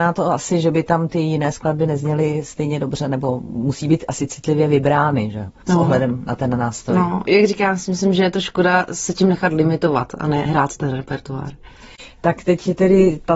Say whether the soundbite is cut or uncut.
uncut